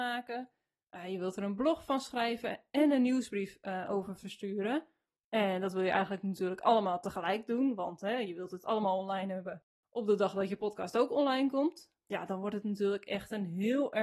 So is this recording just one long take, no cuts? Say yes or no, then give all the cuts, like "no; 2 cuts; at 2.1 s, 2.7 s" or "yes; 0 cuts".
yes; 0 cuts